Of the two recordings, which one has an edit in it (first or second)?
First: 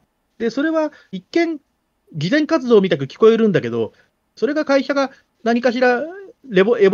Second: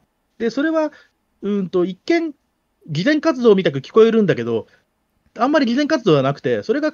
first